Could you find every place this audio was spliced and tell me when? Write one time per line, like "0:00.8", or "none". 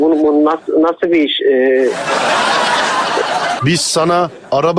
0:03.6